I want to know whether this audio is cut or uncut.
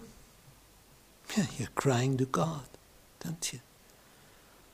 uncut